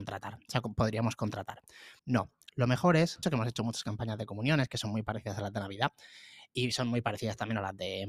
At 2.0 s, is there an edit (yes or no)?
yes